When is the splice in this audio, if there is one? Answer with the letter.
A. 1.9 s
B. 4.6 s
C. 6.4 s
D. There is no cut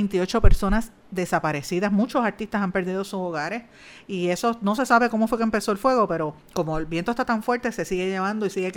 C